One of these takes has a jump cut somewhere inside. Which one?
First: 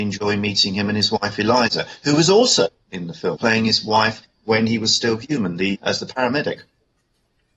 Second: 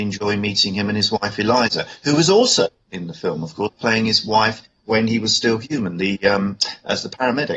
first; 2 cuts; at 3.3 s, 5.8 s

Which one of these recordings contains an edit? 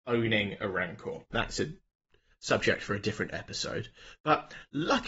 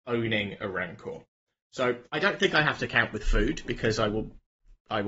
first; 1 cut; at 1.3 s

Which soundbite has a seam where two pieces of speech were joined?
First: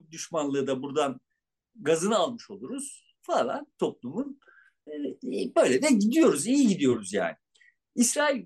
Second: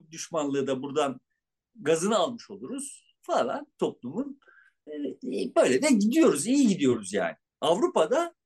second; 1 cut; at 7.5 s

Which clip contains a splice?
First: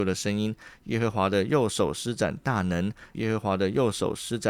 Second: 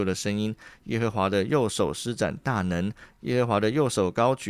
first; 1 cut; at 3.1 s

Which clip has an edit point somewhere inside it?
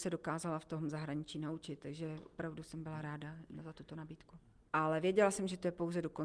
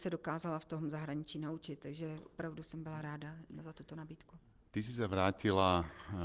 first; 1 cut; at 4.7 s

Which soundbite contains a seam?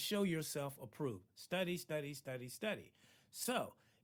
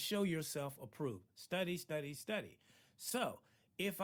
second; 1 cut; at 2.1 s

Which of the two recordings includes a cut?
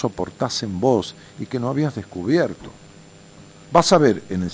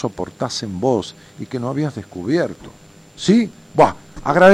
second; 1 cut; at 3.1 s

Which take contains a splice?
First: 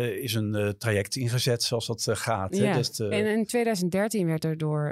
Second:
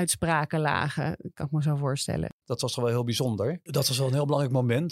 second; 2 cuts; at 2.4 s, 3.7 s

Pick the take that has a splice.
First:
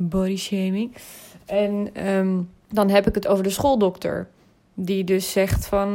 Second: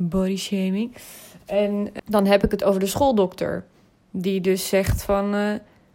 second; 1 cut; at 2.0 s

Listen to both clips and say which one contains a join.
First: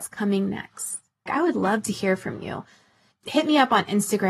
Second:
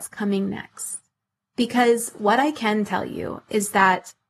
first; 1 cut; at 1.3 s

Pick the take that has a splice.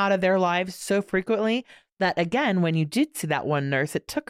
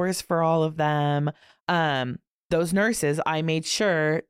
second; 1 cut; at 1.6 s

